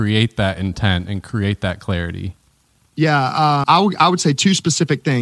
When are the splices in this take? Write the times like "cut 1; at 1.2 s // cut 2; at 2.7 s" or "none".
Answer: cut 1; at 3.6 s